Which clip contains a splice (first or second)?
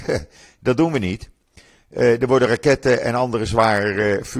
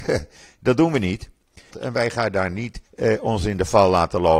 second